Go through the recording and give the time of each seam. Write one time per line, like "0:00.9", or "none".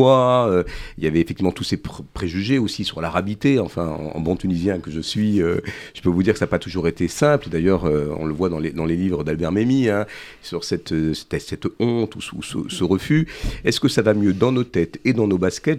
none